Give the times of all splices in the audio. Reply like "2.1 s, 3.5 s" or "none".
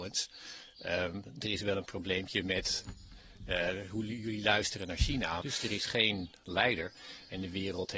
5.4 s